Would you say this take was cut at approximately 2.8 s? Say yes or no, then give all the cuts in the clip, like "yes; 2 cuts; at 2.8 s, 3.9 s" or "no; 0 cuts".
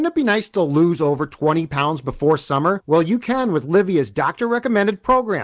no; 0 cuts